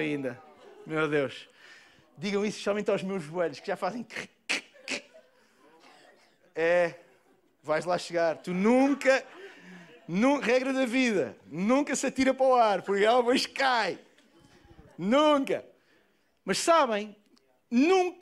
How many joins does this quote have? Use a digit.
0